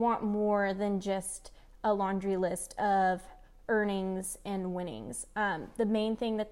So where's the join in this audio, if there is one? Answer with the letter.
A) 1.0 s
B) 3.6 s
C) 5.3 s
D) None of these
D